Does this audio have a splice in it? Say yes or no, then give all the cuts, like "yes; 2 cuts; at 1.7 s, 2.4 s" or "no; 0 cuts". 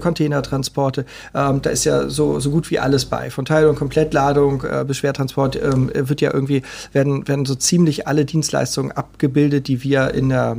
no; 0 cuts